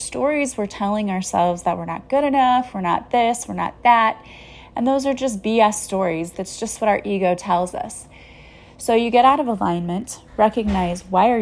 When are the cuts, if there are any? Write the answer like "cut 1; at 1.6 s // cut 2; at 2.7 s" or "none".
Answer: cut 1; at 6.3 s